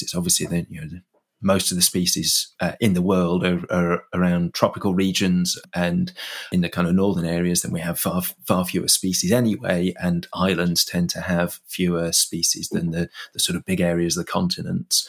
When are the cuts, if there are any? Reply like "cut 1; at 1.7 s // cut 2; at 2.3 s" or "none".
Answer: none